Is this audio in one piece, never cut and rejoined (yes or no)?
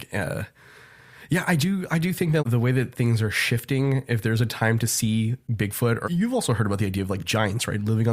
no